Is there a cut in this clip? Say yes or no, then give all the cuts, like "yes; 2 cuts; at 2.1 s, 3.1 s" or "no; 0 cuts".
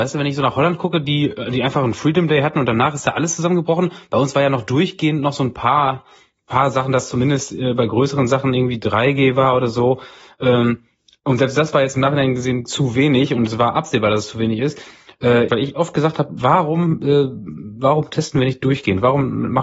yes; 1 cut; at 15.5 s